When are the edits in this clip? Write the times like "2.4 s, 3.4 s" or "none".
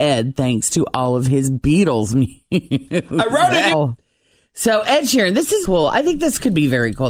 3.7 s, 5.6 s

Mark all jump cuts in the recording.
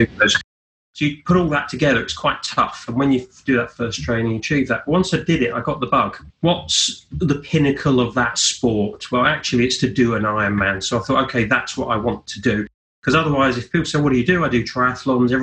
6.3 s

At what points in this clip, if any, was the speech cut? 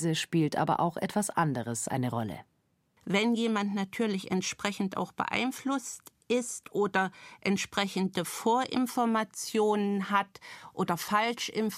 none

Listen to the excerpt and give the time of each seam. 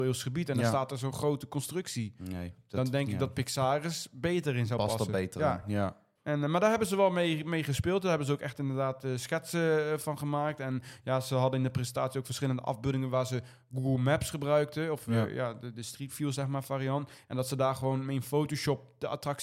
none

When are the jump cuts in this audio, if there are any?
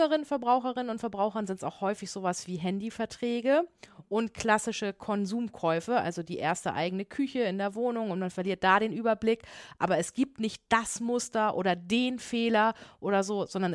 none

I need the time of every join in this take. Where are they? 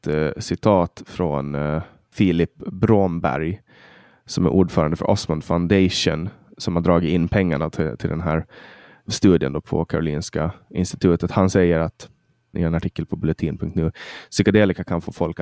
none

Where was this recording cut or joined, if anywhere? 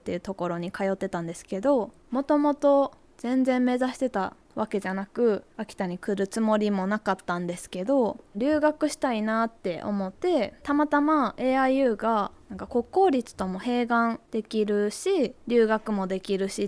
10.1 s

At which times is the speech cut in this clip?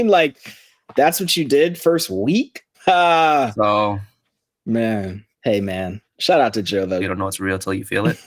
2.7 s, 5.3 s, 7.0 s

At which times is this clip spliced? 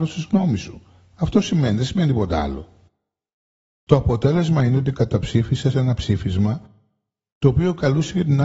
none

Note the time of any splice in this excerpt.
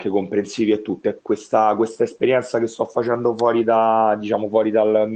1.2 s

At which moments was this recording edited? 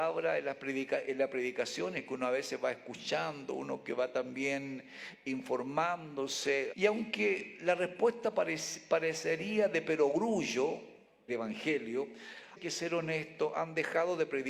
6.7 s, 11.3 s, 12.6 s

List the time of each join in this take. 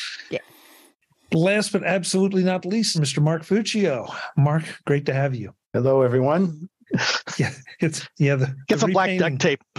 2.9 s, 5.6 s, 6.9 s

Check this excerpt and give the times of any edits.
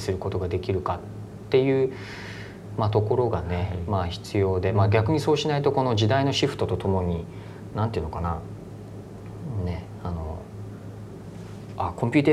none

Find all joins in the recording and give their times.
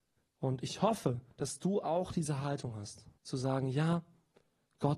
1.3 s, 3.2 s

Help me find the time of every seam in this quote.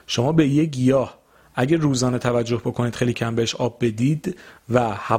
3.1 s

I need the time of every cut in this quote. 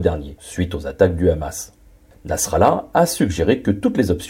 none

